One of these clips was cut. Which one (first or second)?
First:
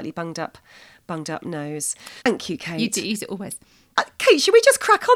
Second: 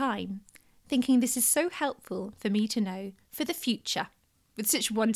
first